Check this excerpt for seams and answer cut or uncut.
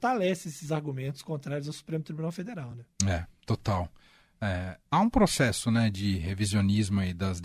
uncut